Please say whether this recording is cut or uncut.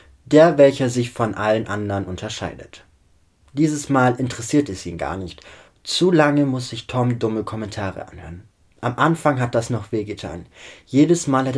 uncut